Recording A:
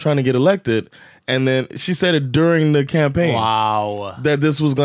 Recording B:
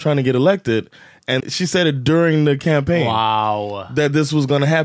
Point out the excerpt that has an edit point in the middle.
B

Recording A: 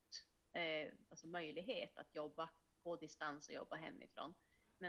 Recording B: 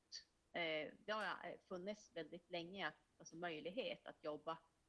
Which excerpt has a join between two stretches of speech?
A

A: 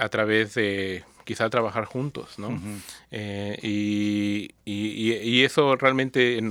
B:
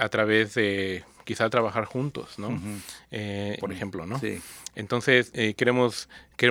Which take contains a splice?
B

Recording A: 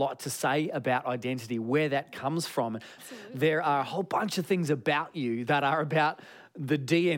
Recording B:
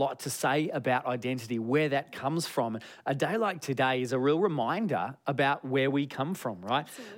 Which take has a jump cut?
A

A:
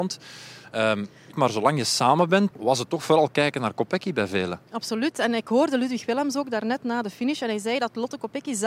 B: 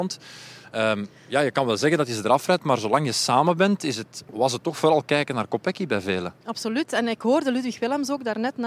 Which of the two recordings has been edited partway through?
A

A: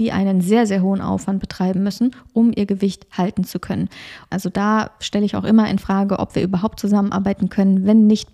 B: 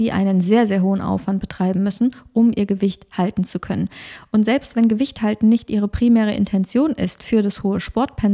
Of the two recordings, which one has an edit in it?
A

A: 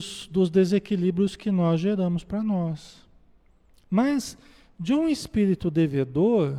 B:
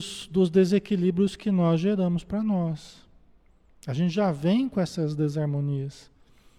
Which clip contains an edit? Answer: A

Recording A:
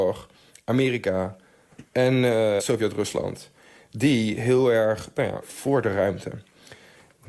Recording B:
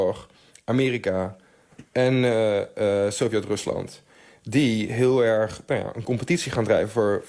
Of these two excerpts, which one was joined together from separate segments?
A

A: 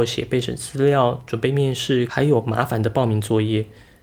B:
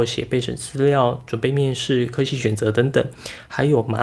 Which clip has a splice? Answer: A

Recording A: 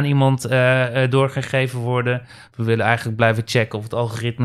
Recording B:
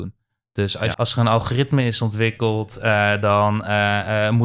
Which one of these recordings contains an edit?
B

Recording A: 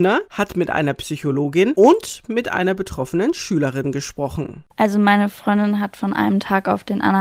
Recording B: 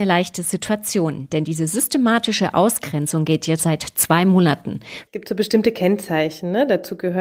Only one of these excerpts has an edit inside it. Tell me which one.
B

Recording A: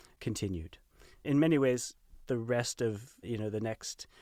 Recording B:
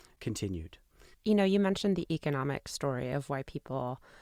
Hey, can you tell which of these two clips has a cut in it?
B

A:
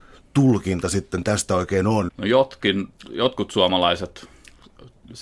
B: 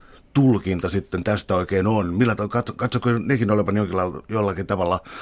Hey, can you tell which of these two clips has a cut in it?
A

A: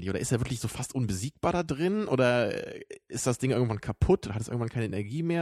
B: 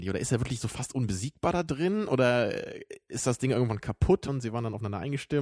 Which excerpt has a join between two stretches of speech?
B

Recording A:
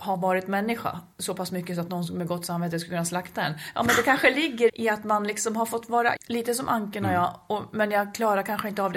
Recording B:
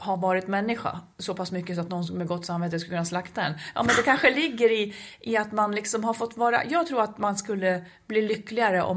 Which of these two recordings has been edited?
A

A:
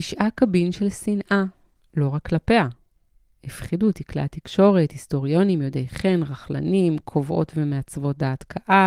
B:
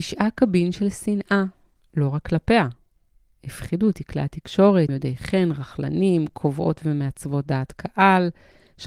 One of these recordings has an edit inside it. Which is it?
B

